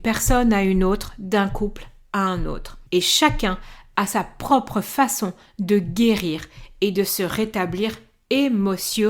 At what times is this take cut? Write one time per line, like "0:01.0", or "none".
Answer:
0:02.9